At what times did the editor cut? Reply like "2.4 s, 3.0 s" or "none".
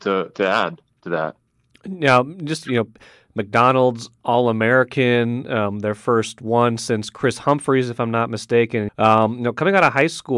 8.9 s